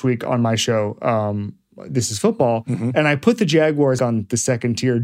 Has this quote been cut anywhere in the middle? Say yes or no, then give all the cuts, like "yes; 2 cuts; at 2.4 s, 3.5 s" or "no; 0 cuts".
yes; 1 cut; at 4.0 s